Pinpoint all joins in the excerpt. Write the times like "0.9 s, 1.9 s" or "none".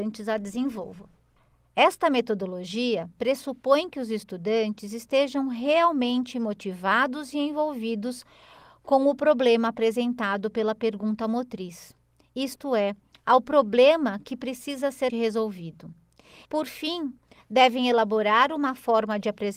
15.1 s, 16.5 s